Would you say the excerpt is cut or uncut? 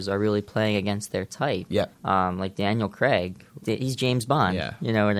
cut